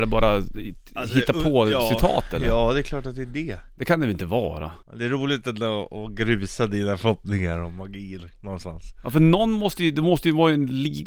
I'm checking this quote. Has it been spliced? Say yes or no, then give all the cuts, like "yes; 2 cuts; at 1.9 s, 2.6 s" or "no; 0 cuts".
yes; 1 cut; at 4.8 s